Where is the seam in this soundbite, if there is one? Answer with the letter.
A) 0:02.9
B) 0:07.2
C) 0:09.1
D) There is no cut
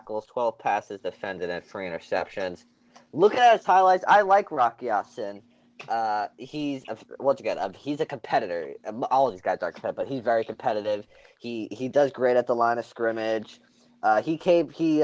D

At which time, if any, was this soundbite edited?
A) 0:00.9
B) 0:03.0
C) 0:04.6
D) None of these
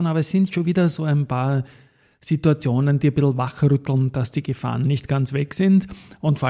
D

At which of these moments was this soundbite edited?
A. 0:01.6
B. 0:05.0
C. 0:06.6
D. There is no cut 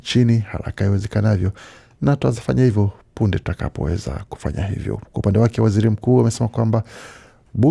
D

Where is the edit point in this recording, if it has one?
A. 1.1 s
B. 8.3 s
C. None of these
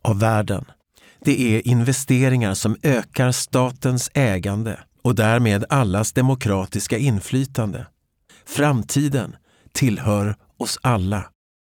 B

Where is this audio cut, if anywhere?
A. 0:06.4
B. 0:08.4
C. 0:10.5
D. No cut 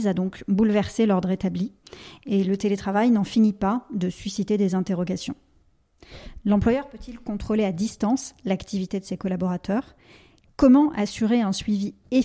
A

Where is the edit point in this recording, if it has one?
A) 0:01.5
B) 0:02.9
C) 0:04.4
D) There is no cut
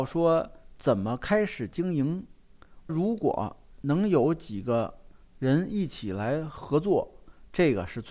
B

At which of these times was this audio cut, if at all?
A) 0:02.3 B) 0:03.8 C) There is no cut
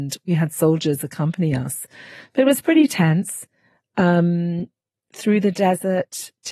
C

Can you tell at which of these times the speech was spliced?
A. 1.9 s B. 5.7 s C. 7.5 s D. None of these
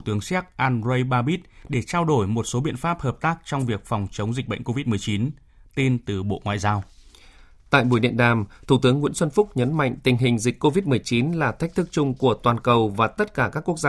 D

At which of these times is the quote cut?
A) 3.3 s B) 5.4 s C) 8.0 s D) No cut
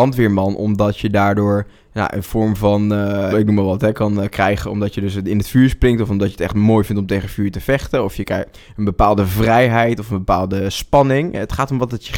A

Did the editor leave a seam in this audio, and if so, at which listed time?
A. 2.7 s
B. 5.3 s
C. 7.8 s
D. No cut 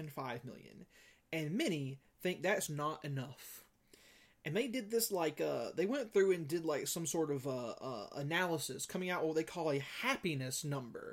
A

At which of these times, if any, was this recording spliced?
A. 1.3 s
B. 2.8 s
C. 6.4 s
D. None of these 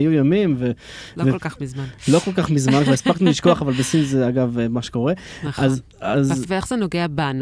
C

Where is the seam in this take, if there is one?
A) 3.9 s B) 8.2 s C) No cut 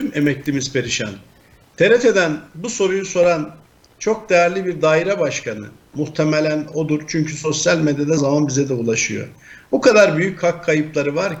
B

